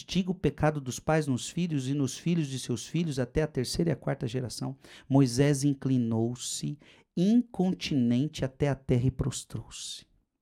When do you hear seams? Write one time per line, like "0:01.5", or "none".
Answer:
none